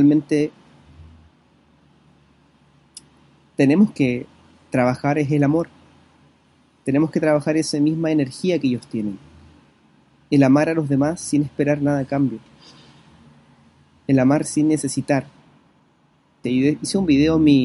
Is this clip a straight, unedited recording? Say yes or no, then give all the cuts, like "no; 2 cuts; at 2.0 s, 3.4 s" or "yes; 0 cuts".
no; 1 cut; at 16.4 s